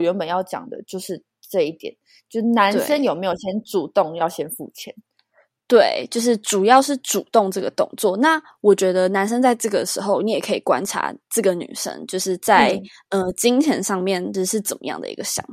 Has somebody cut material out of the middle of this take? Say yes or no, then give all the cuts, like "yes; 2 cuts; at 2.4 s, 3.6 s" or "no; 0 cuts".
no; 0 cuts